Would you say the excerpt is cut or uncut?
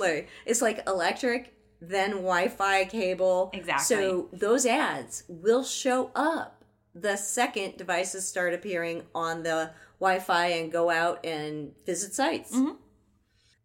uncut